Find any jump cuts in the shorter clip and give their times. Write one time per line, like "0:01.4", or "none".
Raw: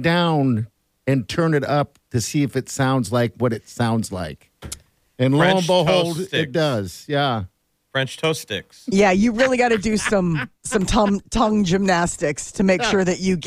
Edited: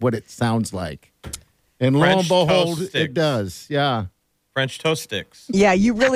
none

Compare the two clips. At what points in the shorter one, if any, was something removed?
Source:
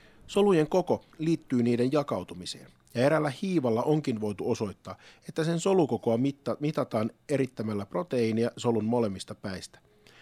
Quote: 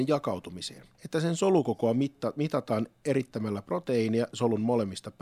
0:00.9

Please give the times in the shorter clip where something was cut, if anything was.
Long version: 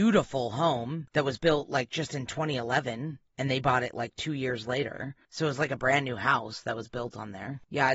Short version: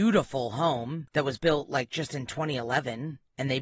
none

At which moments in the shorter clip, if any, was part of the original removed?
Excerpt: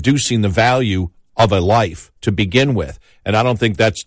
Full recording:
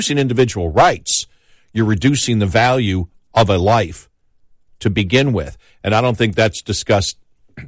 0:02.2

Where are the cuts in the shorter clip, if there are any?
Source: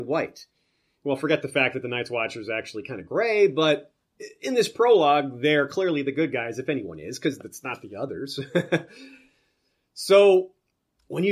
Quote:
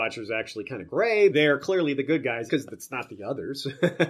0:01.3
0:02.5

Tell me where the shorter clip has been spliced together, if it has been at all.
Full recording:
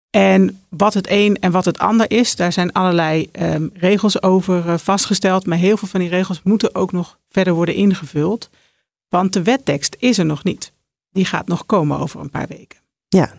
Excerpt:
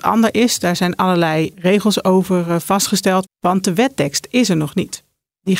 0:01.5
0:03.2

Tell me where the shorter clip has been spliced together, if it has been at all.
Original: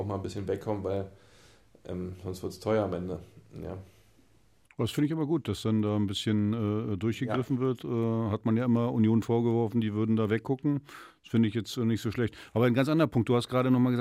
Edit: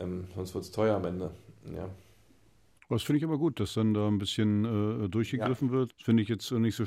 0:05.9

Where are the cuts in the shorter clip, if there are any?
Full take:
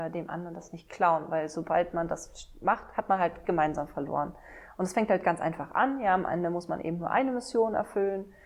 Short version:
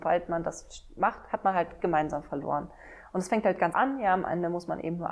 0:03.7

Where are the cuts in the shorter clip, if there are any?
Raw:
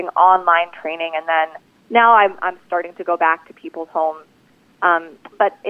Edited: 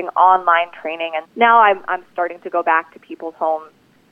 0:01.2

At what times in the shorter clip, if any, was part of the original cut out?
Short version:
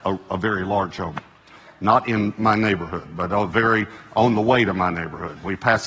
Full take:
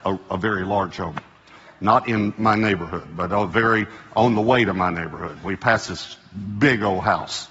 none

